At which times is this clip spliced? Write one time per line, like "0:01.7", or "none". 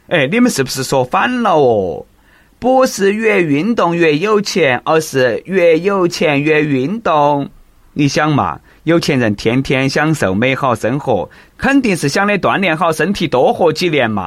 none